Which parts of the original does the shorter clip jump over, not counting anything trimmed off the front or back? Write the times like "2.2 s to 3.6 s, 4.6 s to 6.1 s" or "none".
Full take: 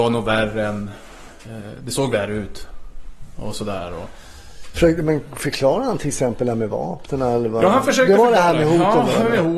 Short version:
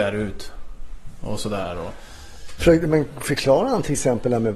none